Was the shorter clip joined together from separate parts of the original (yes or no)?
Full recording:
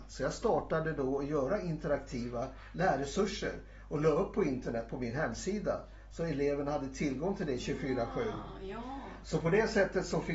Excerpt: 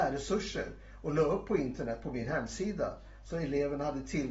no